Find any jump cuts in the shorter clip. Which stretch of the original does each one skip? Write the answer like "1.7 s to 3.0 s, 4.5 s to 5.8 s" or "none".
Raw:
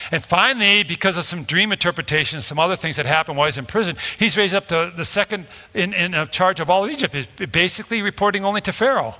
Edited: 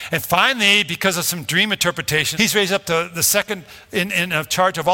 2.3 s to 4.2 s

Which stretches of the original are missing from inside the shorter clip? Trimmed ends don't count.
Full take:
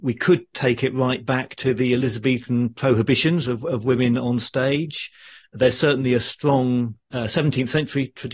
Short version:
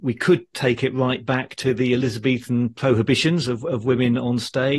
none

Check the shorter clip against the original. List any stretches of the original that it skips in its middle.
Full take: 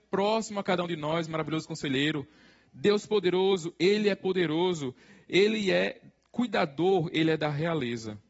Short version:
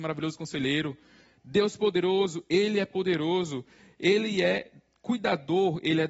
none

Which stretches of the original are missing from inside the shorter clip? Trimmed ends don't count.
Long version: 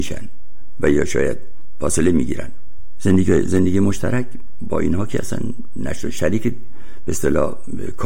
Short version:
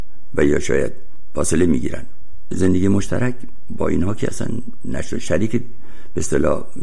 3.0 s to 3.4 s

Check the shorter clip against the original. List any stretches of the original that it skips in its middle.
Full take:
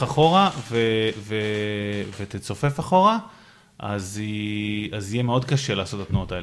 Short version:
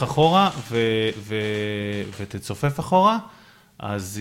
none

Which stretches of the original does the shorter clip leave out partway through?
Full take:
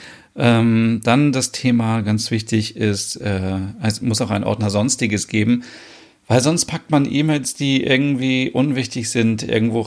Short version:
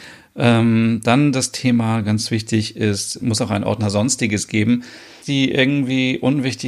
3.2 s to 4.0 s, 6.0 s to 7.5 s

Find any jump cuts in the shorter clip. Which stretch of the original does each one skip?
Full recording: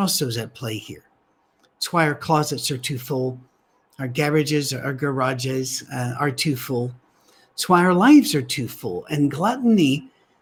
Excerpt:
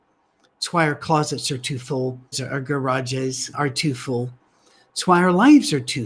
3.5 s to 4.6 s, 5.9 s to 6.1 s

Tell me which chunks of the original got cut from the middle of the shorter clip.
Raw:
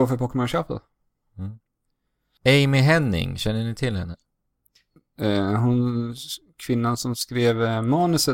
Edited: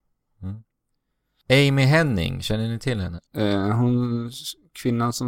4.2 s to 5.1 s

